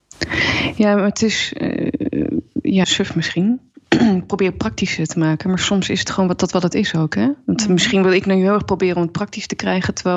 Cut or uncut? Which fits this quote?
cut